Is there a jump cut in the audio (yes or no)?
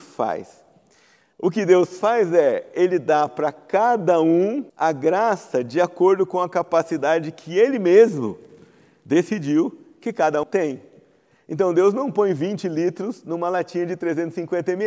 yes